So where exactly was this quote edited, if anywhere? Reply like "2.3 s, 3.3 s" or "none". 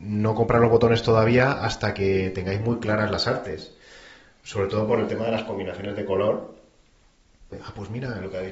7.5 s

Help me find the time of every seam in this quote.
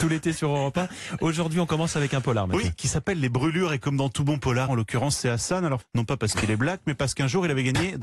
4.7 s, 5.8 s

